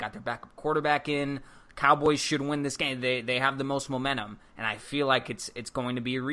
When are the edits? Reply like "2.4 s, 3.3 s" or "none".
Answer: none

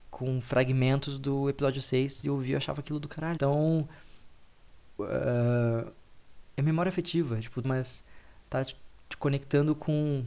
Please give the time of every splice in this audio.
3.4 s, 7.6 s

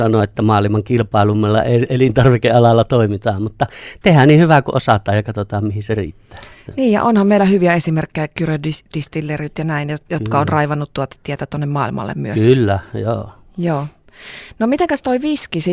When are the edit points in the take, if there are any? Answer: none

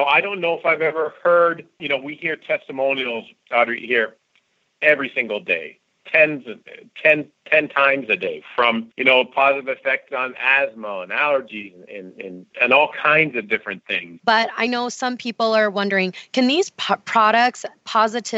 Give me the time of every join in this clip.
12.5 s, 14.2 s

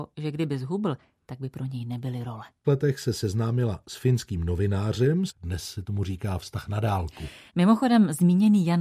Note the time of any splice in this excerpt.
2.6 s, 5.3 s, 7.5 s

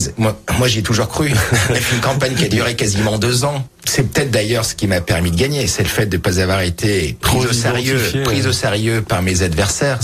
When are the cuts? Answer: none

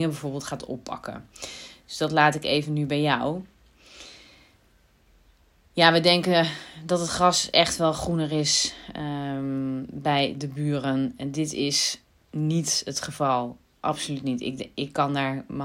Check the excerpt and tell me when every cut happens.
none

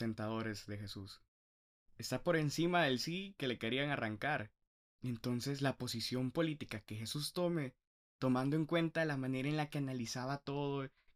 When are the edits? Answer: none

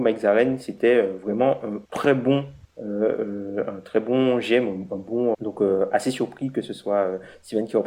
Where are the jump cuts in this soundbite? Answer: 1.8 s, 5.3 s

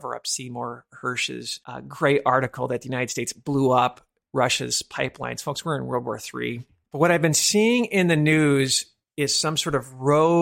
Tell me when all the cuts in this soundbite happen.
6.8 s

